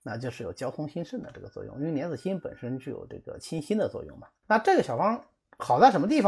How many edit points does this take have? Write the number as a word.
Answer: one